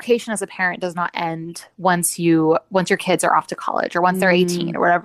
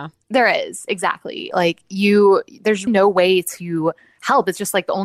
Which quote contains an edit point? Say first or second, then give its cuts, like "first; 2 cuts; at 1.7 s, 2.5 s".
second; 2 cuts; at 1.5 s, 2.9 s